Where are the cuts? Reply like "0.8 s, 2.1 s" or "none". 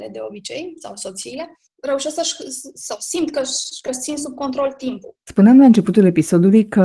none